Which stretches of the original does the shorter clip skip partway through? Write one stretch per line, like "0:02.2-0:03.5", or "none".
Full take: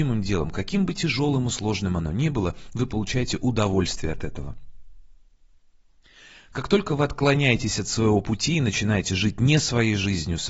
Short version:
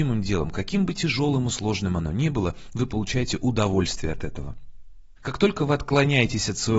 0:05.2-0:06.5

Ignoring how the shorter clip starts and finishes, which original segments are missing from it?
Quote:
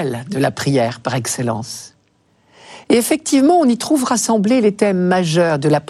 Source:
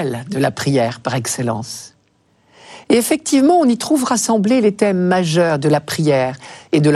none

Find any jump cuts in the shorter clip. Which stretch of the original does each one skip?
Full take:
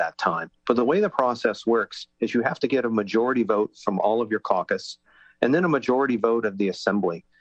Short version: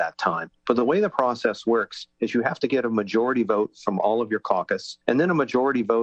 0:05.0-0:05.4

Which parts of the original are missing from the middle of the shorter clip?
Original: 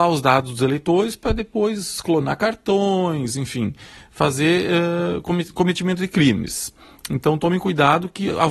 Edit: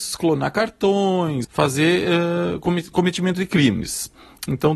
0:03.3-0:04.1

